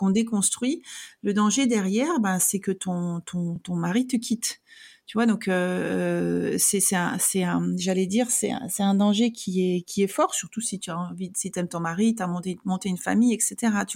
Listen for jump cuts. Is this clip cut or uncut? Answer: uncut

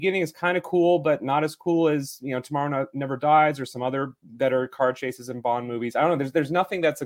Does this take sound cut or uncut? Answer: uncut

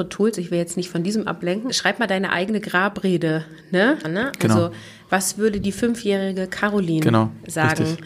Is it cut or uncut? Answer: cut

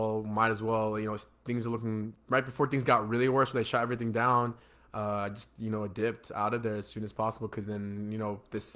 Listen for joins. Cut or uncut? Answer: uncut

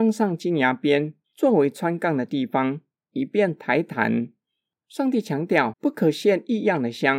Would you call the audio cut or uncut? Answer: cut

